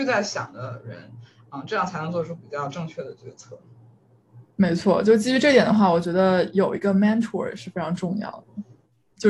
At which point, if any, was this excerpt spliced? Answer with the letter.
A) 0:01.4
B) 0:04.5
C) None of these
B